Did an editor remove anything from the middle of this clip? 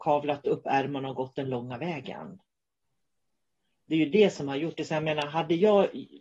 no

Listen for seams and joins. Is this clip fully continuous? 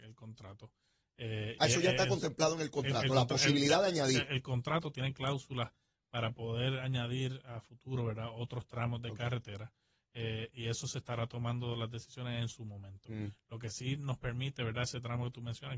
yes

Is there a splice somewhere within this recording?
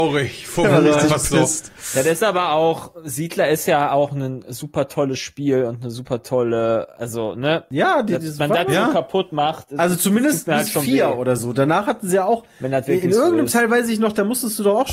no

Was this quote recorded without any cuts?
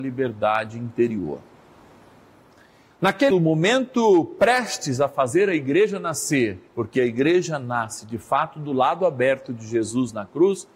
no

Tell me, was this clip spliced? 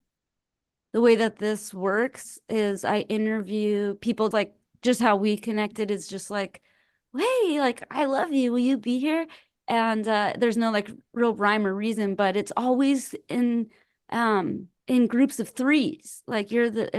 yes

